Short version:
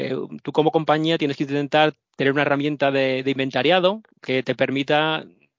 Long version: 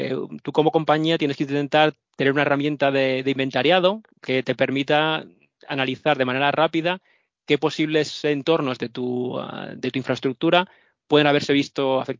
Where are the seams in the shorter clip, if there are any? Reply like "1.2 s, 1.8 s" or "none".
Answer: none